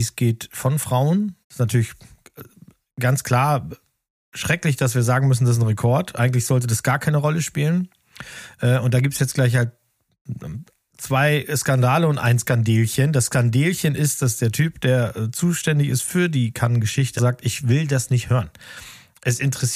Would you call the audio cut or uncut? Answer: cut